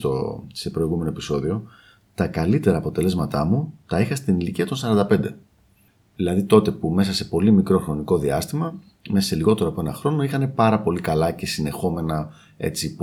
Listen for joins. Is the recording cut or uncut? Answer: uncut